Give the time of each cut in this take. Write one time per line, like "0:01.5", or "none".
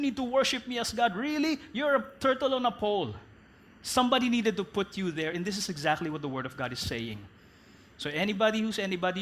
none